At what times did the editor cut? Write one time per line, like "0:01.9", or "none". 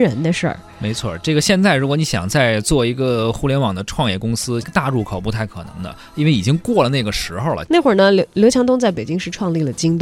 0:04.6
0:07.7